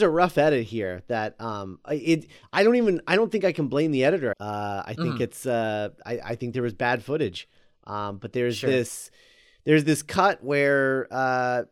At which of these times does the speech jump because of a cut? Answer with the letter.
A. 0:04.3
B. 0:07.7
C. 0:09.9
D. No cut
A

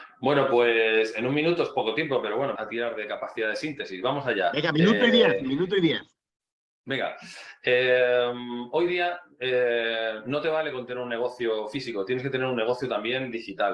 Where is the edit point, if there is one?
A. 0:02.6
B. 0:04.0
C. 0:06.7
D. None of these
A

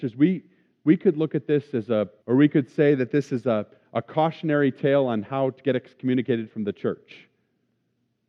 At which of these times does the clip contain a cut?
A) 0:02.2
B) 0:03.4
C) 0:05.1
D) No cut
A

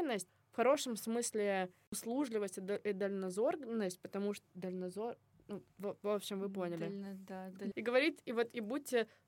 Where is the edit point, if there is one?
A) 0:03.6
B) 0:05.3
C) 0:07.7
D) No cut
C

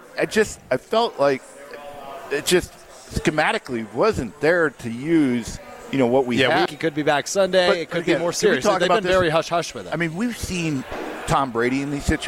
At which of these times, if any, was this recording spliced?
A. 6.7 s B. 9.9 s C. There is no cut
A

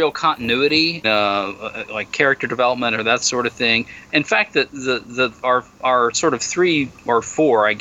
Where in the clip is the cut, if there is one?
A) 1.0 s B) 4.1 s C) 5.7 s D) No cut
A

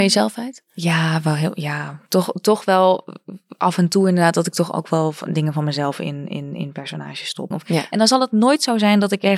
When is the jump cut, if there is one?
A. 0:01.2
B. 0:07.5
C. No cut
B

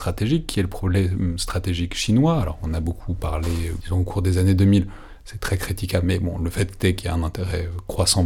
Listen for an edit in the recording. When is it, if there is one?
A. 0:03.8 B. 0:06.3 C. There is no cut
A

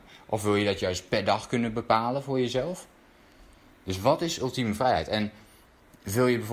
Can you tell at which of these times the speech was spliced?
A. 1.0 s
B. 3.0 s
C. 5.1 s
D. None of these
D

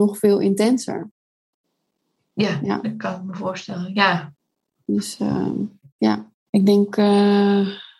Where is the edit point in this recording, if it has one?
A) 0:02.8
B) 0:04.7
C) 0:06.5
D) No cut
C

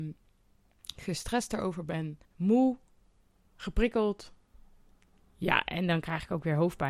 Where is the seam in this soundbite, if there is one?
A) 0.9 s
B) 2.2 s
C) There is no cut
B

